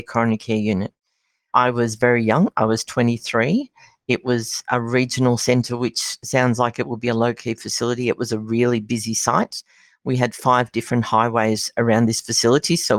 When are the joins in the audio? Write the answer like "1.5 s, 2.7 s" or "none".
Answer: none